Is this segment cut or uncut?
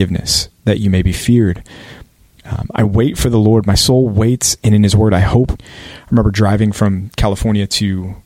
cut